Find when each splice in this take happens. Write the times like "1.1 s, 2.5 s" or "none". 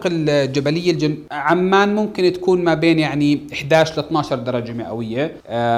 none